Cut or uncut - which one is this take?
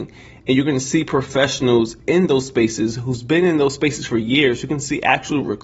uncut